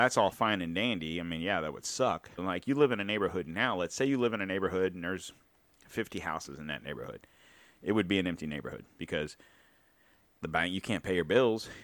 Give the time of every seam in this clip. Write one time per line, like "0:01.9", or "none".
0:02.4

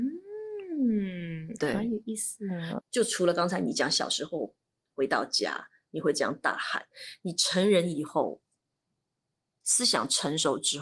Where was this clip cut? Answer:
0:02.8

